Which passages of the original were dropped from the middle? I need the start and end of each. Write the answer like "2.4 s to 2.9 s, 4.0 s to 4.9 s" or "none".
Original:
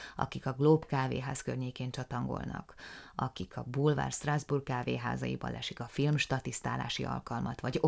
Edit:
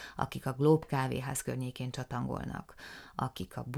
none